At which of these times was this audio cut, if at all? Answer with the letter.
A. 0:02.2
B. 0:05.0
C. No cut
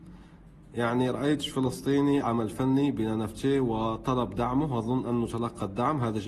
A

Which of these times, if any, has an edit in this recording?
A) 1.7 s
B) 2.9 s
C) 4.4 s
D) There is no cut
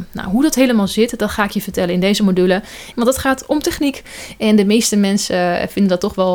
B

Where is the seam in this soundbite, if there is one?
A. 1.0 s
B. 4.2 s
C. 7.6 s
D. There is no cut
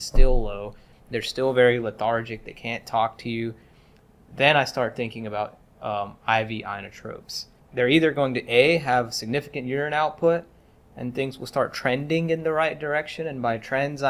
C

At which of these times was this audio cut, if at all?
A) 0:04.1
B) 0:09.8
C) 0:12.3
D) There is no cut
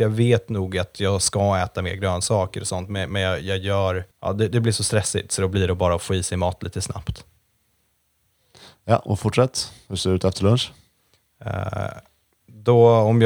A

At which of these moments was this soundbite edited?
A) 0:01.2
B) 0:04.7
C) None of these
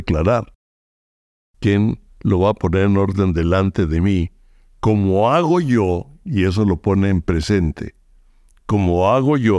C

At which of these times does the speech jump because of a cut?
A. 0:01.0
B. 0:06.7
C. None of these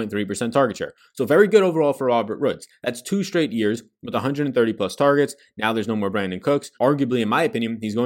B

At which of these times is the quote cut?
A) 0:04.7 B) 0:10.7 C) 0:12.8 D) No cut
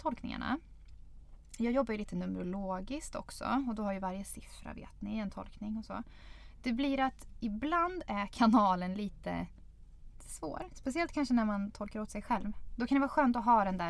C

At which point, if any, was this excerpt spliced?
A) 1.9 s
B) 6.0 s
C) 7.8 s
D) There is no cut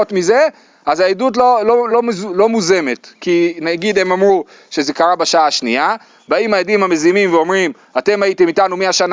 A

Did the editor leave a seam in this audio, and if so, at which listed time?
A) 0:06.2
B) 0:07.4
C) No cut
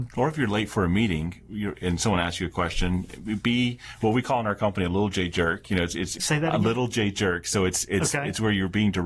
A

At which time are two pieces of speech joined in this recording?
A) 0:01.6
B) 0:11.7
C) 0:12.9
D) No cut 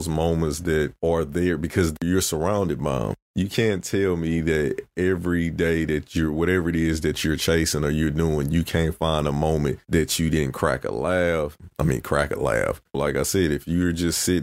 C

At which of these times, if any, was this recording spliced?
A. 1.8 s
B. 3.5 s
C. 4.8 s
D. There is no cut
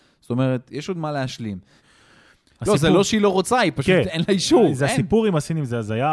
A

